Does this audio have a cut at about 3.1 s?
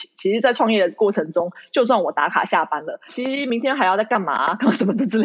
yes; 1 cut; at 3.1 s

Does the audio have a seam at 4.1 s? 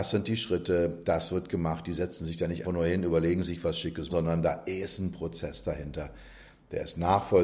yes; 2 cuts; at 2.6 s, 4.1 s

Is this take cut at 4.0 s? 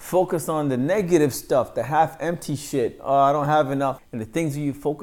yes; 1 cut; at 4.0 s

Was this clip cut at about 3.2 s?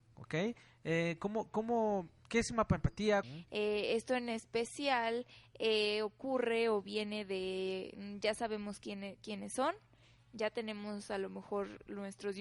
yes; 1 cut; at 3.2 s

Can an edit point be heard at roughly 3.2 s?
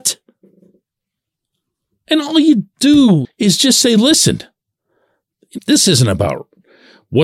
yes; 2 cuts; at 3.2 s, 5.6 s

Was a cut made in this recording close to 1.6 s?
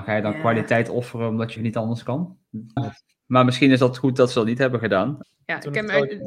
yes; 3 cuts; at 1.6 s, 2.8 s, 5.2 s

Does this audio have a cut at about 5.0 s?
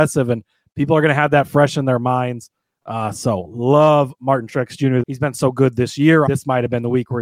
yes; 2 cuts; at 5.0 s, 6.3 s

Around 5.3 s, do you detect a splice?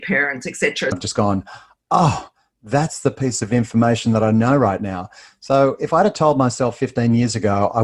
no; 1 cut; at 0.9 s

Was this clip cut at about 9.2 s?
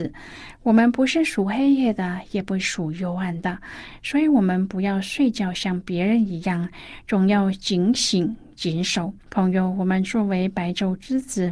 yes; 1 cut; at 9.2 s

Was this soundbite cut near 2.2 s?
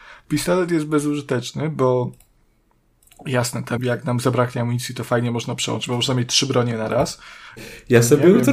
no; 2 cuts; at 3.8 s, 7.6 s

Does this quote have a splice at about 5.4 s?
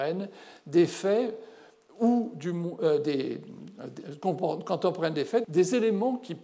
yes; 1 cut; at 5.4 s

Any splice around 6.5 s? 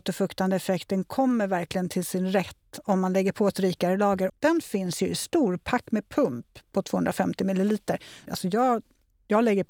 no; 2 cuts; at 4.3 s, 8.3 s

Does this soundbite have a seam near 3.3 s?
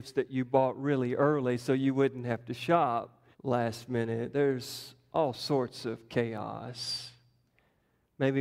yes; 1 cut; at 3.3 s

